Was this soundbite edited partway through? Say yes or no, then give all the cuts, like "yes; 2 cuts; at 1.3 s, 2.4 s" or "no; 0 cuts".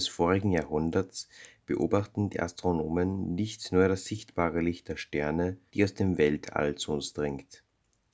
yes; 1 cut; at 5.7 s